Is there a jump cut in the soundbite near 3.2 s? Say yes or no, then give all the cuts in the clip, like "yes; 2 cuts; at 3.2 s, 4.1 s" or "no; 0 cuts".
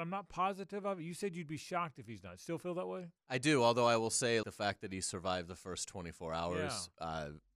yes; 2 cuts; at 3.2 s, 4.4 s